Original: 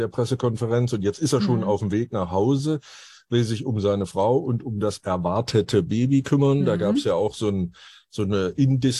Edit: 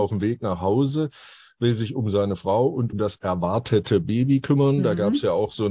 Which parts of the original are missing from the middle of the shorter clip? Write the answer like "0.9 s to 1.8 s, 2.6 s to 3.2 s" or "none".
4.6 s to 4.7 s